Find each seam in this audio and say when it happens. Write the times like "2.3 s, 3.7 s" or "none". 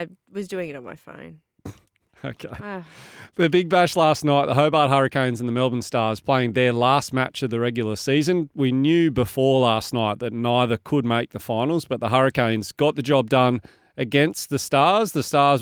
none